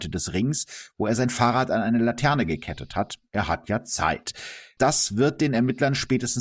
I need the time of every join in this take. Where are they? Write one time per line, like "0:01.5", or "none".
0:04.8